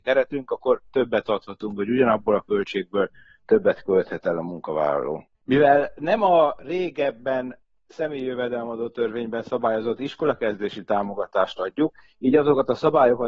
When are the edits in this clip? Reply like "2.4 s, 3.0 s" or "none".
5.3 s